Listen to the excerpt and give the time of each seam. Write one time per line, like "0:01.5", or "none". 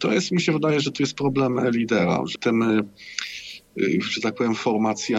0:02.4